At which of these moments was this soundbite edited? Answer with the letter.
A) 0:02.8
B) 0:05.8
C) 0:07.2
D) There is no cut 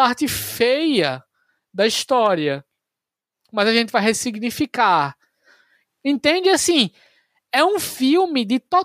B